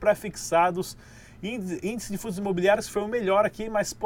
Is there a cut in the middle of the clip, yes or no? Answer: no